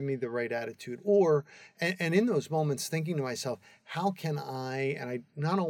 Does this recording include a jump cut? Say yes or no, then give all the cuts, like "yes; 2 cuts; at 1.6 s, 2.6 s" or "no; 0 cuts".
no; 0 cuts